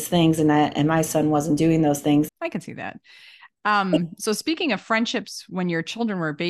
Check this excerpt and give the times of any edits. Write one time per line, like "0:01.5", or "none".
0:02.3